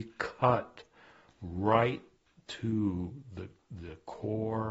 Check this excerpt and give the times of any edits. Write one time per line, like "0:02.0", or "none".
none